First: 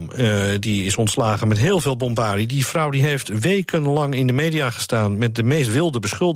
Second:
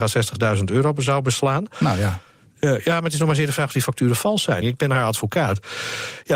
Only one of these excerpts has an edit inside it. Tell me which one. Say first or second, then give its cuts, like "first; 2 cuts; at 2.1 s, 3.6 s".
second; 1 cut; at 4.6 s